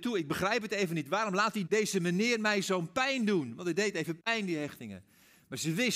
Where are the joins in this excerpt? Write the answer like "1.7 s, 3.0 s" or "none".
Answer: 1.7 s